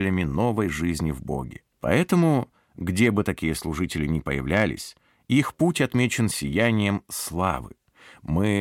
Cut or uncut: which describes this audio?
cut